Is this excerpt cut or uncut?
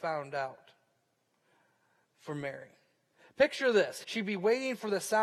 cut